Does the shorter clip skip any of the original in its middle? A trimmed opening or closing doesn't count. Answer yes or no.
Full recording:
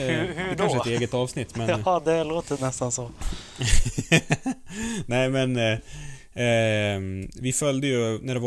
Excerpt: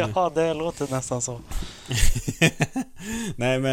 no